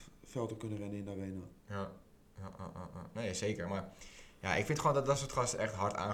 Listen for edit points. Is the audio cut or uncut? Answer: cut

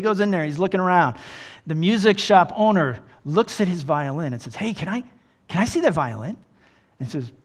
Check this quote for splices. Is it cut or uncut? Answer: uncut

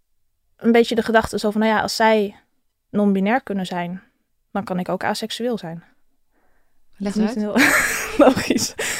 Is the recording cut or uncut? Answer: cut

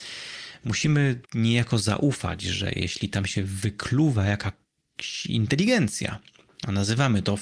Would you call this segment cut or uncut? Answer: cut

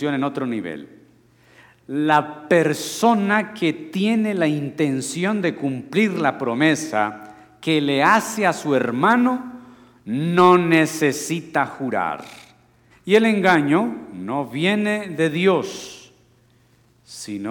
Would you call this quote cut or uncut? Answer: cut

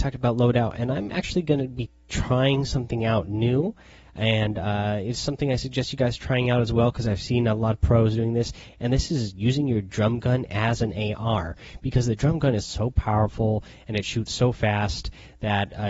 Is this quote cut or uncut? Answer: uncut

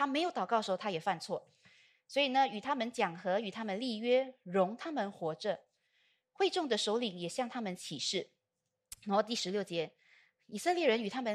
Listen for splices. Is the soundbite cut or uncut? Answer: uncut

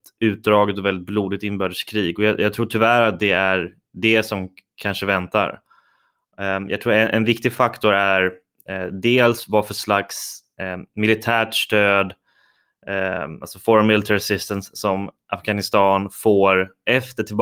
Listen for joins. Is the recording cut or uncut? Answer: uncut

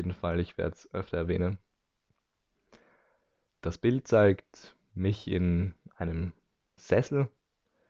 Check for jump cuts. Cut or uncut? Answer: cut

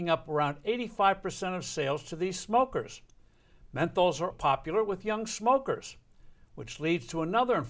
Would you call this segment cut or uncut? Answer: cut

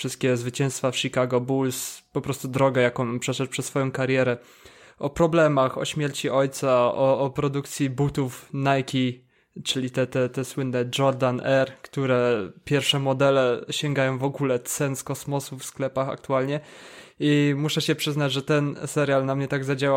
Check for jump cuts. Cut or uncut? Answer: uncut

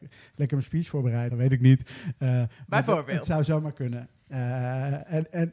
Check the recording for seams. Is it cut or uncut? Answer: cut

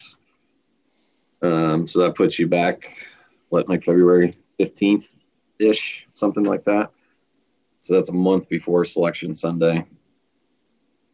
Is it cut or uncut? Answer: cut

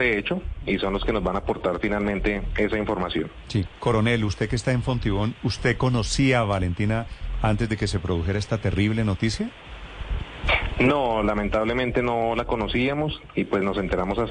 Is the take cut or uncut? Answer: uncut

